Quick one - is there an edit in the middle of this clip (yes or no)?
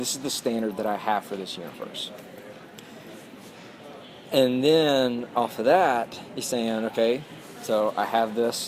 no